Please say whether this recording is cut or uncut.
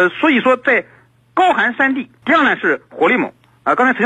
cut